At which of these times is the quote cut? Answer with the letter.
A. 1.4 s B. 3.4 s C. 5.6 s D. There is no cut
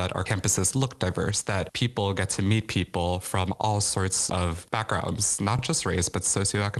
D